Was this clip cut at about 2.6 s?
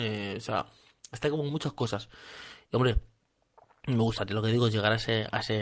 no; 0 cuts

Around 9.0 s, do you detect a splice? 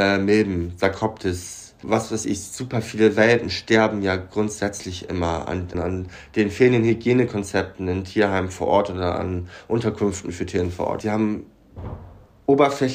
no; 3 cuts; at 1.8 s, 5.7 s, 11.0 s

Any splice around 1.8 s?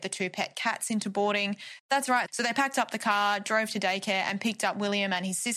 yes; 1 cut; at 1.8 s

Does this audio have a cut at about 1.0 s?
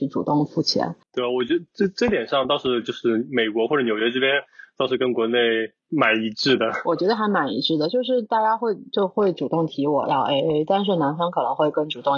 yes; 1 cut; at 1.0 s

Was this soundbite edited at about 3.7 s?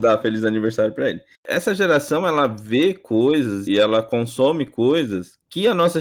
yes; 2 cuts; at 1.3 s, 3.7 s

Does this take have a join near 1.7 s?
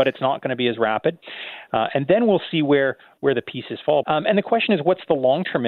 yes; 2 cuts; at 1.7 s, 4.0 s

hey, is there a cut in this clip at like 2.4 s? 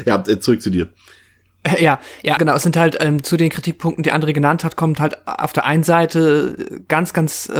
yes; 1 cut; at 2.4 s

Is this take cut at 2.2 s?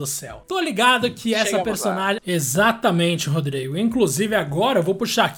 yes; 1 cut; at 2.2 s

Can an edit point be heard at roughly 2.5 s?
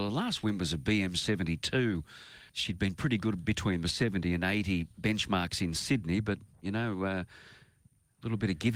yes; 1 cut; at 2.5 s

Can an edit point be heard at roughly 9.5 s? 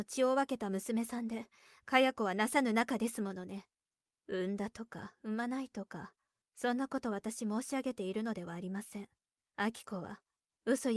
yes; 2 cuts; at 4.2 s, 9.5 s

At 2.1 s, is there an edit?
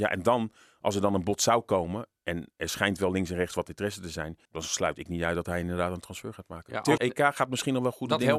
no; 2 cuts; at 4.5 s, 7.0 s

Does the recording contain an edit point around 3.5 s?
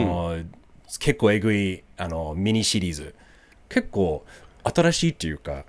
yes; 1 cut; at 3.5 s

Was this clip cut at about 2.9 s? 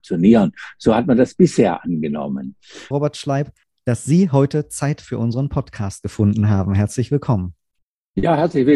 yes; 1 cut; at 2.9 s

